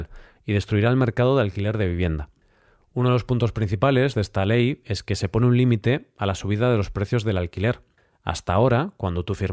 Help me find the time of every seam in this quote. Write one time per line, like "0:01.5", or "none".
none